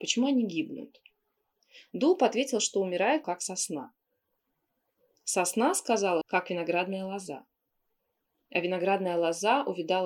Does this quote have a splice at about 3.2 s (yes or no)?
yes